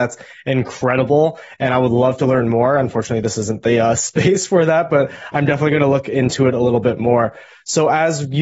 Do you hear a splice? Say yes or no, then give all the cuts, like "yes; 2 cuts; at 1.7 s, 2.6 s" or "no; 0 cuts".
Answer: no; 0 cuts